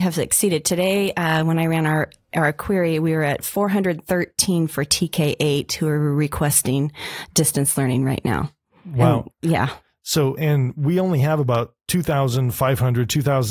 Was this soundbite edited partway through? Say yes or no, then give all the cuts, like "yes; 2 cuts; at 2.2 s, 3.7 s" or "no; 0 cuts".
yes; 2 cuts; at 10.4 s, 11.8 s